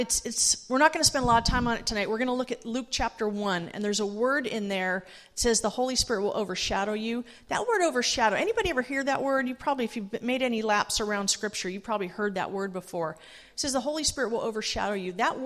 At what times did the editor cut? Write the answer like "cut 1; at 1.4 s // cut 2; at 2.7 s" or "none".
none